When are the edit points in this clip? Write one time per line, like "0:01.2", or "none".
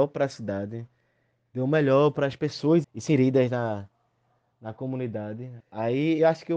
0:02.8
0:05.6